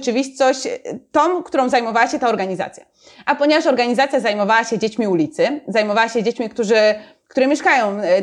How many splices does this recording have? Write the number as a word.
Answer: zero